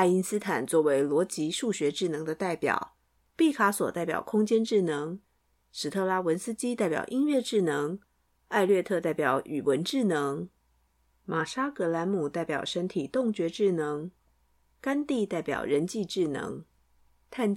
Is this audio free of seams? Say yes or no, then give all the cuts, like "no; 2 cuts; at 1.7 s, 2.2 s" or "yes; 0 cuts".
yes; 0 cuts